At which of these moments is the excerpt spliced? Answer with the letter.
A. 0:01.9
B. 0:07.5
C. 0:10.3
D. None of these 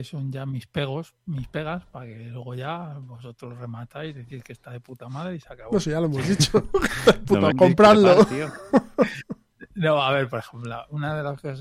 B